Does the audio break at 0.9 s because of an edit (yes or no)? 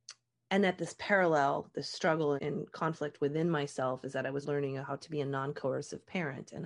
no